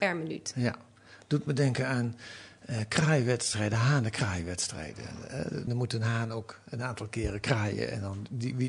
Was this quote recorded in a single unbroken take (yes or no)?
no